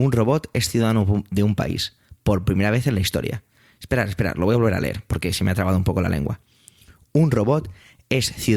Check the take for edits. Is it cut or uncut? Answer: uncut